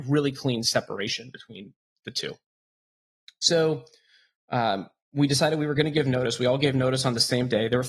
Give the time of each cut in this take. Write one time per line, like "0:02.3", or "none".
none